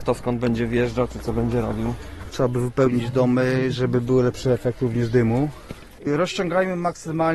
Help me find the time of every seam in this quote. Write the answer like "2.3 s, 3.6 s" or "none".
2.3 s, 6.0 s